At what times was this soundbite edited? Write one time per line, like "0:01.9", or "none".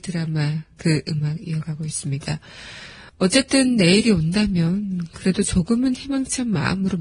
0:03.1